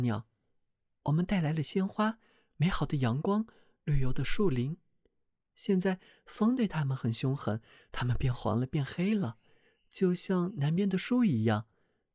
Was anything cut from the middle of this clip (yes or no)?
yes